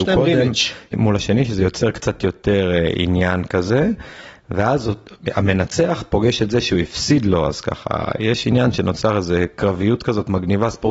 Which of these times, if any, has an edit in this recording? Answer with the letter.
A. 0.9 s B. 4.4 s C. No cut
A